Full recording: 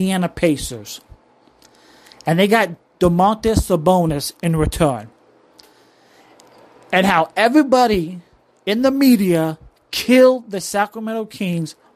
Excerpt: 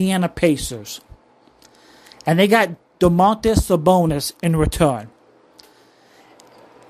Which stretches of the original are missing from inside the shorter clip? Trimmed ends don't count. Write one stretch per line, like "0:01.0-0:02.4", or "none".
none